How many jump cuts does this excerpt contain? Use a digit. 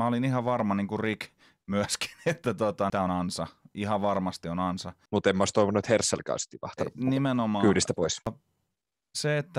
2